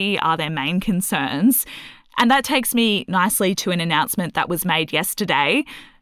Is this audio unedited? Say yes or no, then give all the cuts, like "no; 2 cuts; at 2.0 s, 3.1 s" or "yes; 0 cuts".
yes; 0 cuts